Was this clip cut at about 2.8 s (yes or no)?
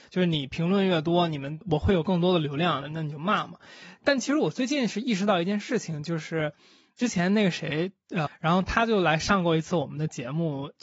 yes